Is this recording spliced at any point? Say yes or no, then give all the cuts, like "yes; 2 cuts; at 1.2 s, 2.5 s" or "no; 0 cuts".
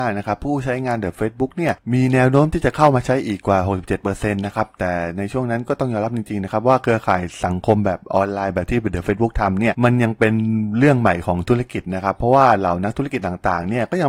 no; 0 cuts